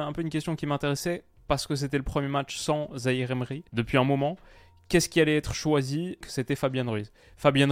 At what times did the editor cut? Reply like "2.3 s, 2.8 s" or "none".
3.7 s, 6.2 s